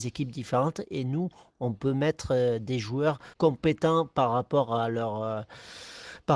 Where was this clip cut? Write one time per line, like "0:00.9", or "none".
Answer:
0:03.3